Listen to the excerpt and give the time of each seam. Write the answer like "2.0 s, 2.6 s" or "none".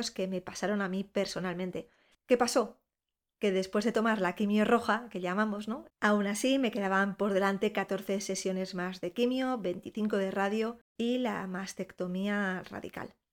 2.1 s, 5.9 s, 10.9 s